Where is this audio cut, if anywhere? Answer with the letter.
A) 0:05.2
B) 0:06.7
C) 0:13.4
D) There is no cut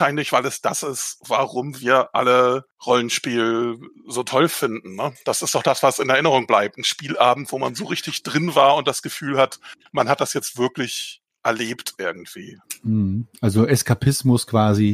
D